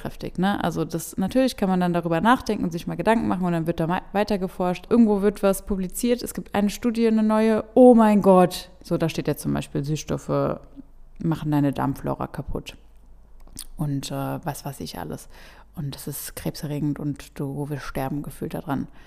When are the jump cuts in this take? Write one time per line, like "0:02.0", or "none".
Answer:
0:04.9

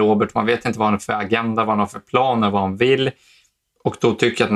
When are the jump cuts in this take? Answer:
none

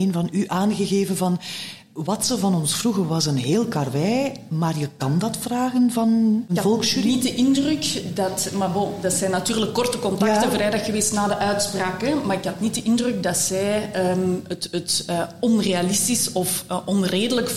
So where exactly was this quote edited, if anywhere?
none

